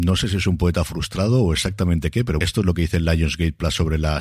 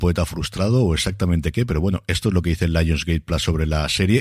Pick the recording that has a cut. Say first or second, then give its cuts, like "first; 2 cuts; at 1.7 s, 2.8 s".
first; 1 cut; at 2.4 s